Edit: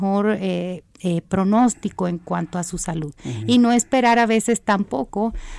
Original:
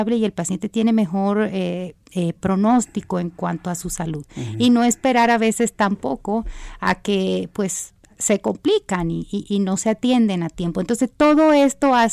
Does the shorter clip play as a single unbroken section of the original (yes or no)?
yes